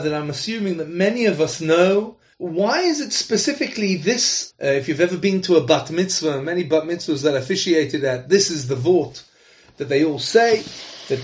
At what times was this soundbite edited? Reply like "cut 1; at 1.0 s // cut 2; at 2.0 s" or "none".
cut 1; at 2.3 s // cut 2; at 4.5 s

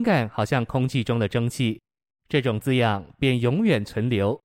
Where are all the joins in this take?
cut 1; at 2.1 s

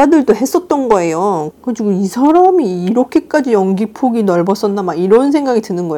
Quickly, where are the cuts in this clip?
cut 1; at 1.5 s

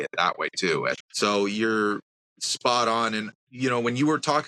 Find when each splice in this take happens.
cut 1; at 1.0 s

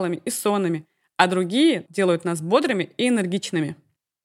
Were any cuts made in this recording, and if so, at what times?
cut 1; at 1.9 s

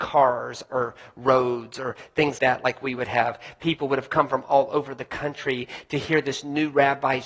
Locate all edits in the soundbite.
cut 1; at 2.4 s

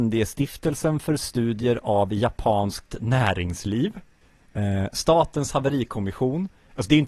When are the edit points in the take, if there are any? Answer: none

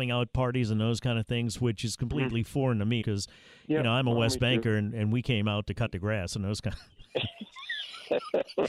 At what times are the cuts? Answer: cut 1; at 3.0 s

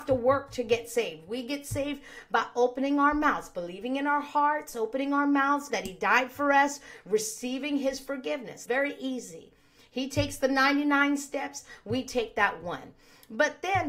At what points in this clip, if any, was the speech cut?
cut 1; at 5.7 s // cut 2; at 8.7 s

